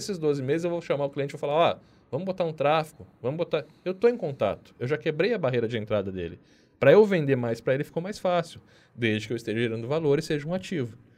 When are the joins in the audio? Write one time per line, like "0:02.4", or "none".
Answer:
none